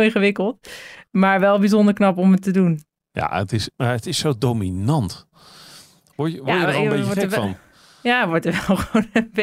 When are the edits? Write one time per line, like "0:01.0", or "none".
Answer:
0:03.7